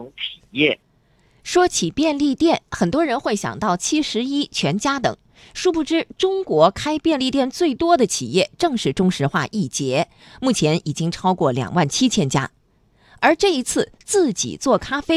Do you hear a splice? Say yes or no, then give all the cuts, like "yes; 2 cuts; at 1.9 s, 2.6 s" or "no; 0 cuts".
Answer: no; 0 cuts